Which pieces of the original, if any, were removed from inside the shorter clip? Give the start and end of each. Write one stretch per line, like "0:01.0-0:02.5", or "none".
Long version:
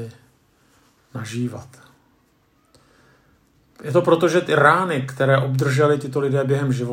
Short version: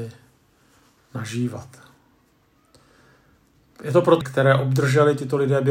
0:04.2-0:05.0